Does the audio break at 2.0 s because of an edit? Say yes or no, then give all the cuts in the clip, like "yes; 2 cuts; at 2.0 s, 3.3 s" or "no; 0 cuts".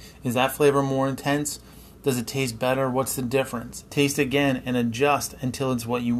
no; 1 cut; at 3.9 s